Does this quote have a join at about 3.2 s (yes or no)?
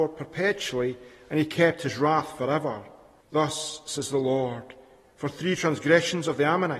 yes